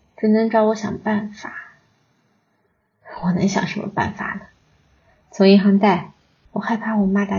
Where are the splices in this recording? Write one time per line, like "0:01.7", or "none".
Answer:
0:06.5